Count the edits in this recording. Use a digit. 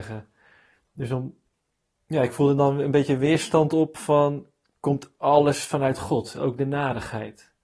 0